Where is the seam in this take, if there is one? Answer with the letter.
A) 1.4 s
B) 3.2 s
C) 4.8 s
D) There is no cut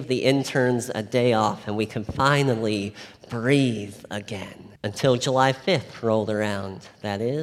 C